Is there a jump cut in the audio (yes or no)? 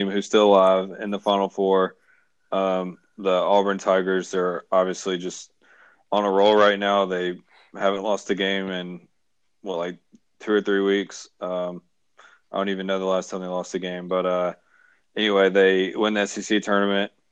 no